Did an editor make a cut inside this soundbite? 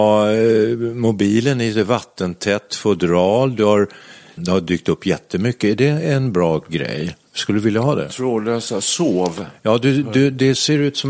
yes; 1 cut; at 4.4 s

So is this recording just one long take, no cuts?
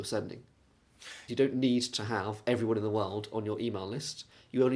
no; 1 cut; at 1.3 s

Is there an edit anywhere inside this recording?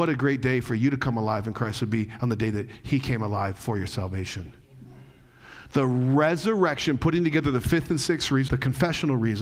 yes; 1 cut; at 8.5 s

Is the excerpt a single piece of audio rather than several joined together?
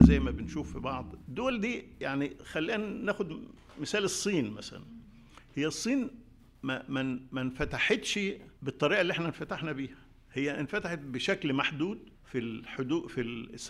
no; 3 cuts; at 1.2 s, 8.6 s, 12.1 s

